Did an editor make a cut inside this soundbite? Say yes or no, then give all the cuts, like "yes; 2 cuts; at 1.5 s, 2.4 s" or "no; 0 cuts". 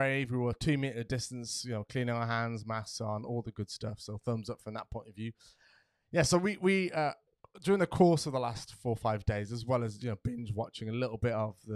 no; 0 cuts